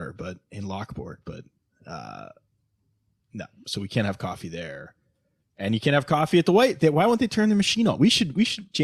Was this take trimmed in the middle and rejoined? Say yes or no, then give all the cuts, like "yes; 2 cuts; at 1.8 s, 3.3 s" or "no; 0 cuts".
no; 0 cuts